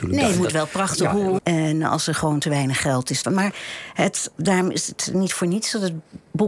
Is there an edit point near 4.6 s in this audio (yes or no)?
no